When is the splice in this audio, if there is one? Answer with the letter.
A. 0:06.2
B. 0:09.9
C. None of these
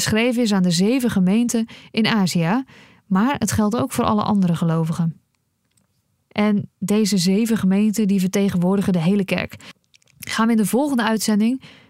A